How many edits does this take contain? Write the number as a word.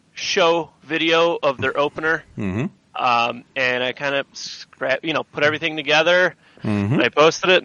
one